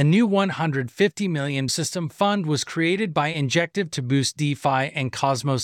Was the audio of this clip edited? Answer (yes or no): yes